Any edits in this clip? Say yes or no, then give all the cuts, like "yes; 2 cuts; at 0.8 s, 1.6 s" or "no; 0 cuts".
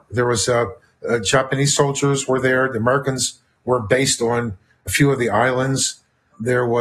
no; 0 cuts